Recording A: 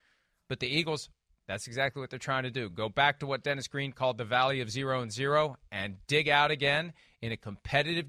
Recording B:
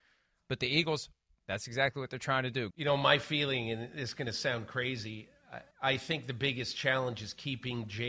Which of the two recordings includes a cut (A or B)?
B